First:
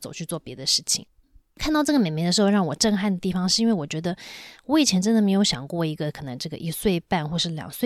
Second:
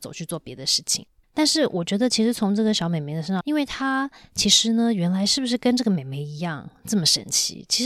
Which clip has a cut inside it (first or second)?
second